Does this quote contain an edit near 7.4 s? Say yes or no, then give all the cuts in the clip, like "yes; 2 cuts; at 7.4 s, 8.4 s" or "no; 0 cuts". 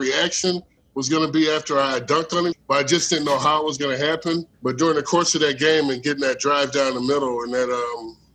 no; 2 cuts; at 2.5 s, 4.5 s